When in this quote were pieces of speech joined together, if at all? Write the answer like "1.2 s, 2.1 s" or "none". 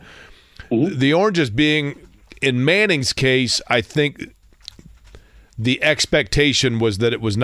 none